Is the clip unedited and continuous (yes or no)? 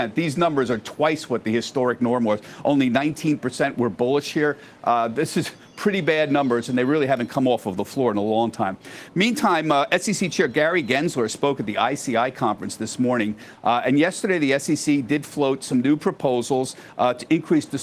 yes